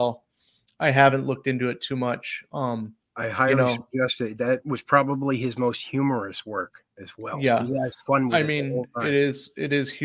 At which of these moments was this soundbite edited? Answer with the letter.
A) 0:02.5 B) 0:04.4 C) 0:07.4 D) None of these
D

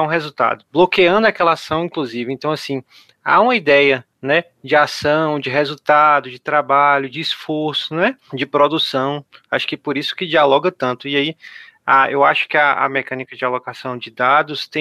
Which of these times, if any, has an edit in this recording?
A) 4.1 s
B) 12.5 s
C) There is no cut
A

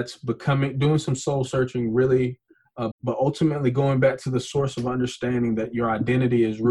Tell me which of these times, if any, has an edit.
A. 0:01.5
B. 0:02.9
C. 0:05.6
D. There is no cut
B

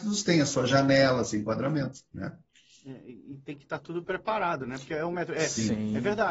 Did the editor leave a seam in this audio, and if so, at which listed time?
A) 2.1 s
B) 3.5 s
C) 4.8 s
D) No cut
A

